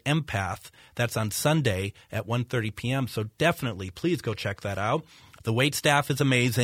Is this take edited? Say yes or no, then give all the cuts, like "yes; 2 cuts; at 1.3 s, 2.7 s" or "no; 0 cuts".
yes; 1 cut; at 5.4 s